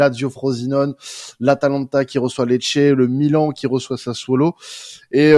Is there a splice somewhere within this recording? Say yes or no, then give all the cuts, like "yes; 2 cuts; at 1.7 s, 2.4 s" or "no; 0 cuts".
no; 0 cuts